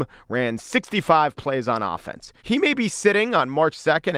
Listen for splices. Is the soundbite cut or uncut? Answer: cut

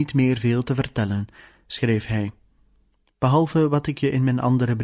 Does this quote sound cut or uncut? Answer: uncut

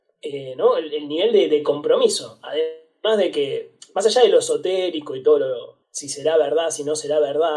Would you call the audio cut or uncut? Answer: cut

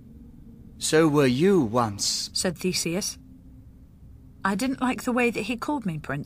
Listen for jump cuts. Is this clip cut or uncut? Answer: cut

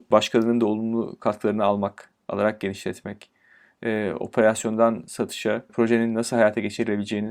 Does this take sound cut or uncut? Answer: cut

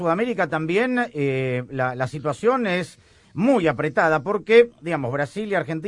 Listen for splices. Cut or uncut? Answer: uncut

